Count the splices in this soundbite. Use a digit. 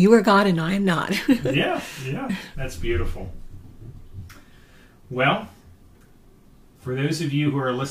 1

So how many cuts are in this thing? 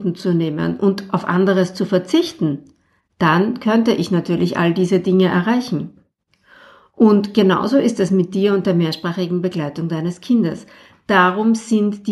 0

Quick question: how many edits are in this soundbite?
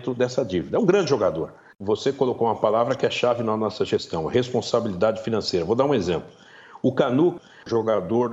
1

